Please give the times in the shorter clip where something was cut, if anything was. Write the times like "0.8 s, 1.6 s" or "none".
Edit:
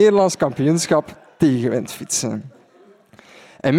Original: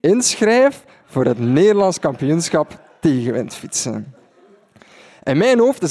none